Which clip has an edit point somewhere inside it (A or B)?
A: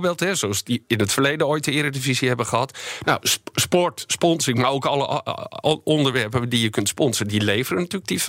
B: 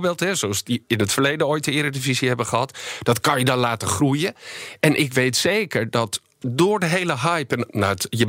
A